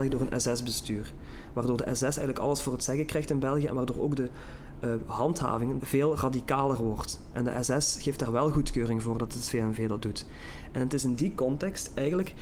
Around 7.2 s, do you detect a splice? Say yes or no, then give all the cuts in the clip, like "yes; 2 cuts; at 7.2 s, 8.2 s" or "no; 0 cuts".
no; 1 cut; at 5.8 s